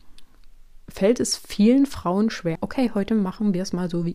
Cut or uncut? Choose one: cut